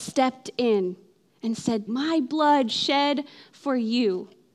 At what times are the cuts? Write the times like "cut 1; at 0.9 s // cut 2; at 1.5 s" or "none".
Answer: cut 1; at 1.9 s